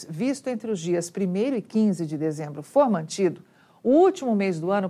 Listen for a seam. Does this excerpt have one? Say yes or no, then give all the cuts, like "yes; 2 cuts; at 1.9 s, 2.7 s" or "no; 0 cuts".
no; 0 cuts